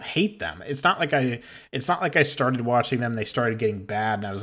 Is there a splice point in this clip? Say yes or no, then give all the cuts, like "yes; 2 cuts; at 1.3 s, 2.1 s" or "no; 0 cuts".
no; 0 cuts